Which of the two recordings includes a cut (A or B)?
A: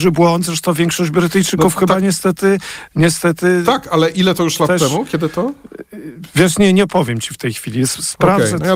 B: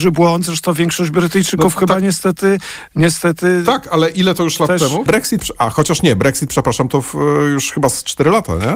B